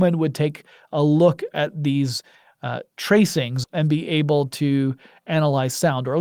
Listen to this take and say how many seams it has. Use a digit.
1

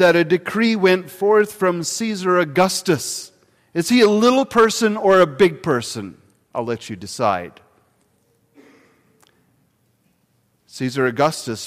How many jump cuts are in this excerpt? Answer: 1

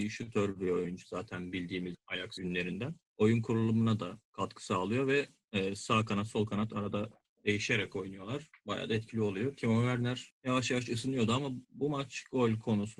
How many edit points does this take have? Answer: 0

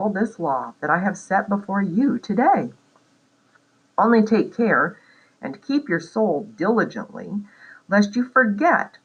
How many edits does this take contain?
0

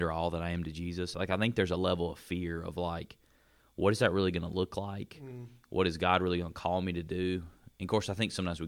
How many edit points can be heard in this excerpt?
1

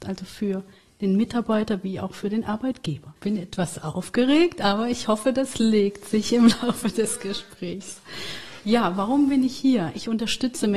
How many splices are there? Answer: 1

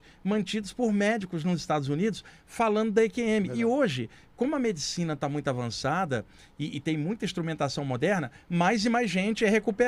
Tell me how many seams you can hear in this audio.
0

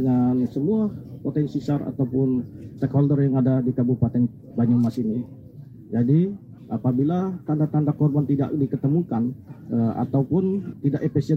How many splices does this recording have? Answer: 1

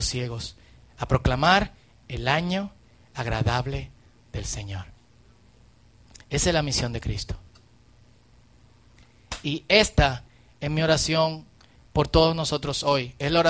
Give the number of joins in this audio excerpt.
0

